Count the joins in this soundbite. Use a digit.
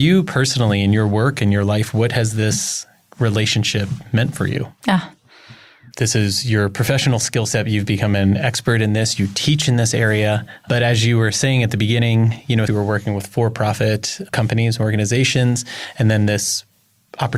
2